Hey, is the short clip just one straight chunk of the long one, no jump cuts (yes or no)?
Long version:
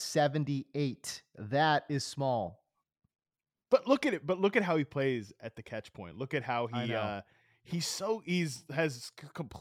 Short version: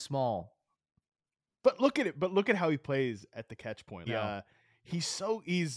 no